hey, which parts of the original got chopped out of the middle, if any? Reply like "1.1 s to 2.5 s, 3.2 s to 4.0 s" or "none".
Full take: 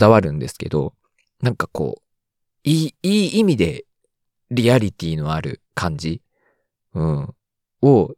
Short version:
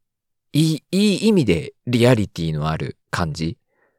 3.9 s to 4.4 s